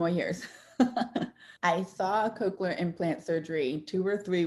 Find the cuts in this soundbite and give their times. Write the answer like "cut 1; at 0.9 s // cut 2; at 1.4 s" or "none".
cut 1; at 1.6 s

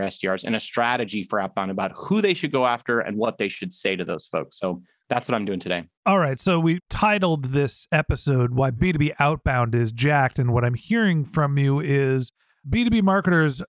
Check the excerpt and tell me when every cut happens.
cut 1; at 6.0 s

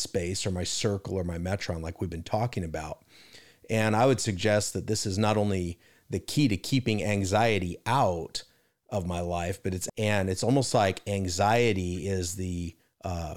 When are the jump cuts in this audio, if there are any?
cut 1; at 9.9 s

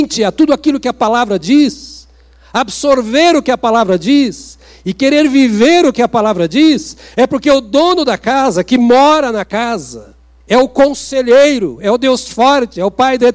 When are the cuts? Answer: cut 1; at 10.4 s

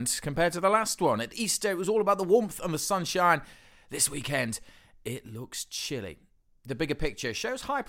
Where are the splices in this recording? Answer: none

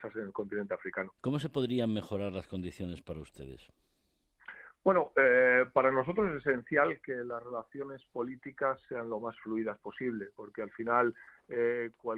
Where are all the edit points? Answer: cut 1; at 1.2 s

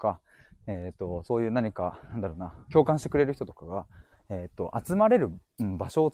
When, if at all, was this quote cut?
none

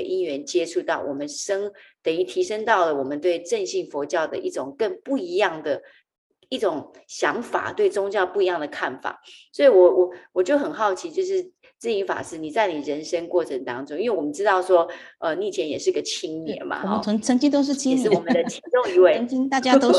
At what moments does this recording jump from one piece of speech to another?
none

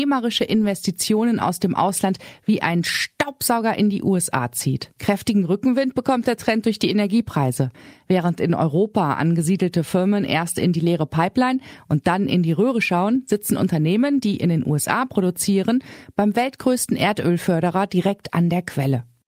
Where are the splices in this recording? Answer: cut 1; at 5.0 s

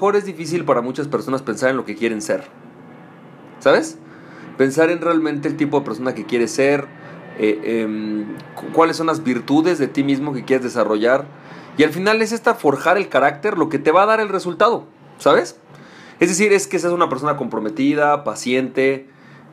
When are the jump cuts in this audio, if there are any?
none

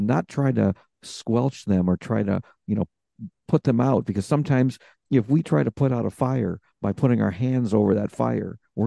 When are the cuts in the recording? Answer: none

